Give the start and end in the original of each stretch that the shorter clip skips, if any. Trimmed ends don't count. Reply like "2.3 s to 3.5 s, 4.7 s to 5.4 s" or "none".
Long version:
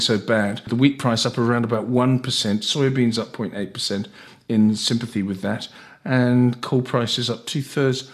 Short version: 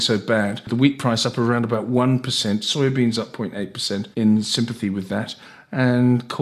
4.1 s to 4.4 s